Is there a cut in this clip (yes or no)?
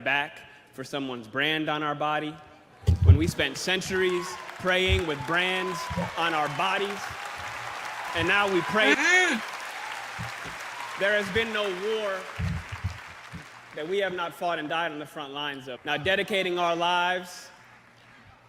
yes